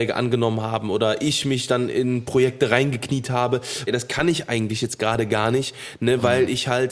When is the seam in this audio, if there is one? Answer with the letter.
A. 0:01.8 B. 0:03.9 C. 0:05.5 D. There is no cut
B